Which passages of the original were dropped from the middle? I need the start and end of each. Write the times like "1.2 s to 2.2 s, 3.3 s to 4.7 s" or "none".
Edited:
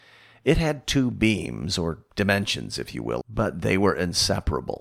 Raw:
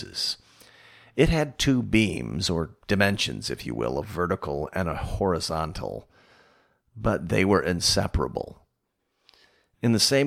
3.9 s to 6.9 s